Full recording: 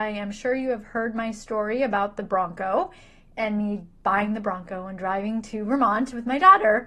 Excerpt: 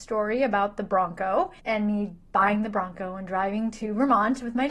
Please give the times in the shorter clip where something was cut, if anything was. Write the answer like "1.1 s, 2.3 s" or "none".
1.6 s